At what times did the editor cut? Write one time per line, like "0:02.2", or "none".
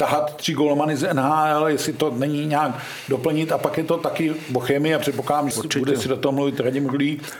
0:05.5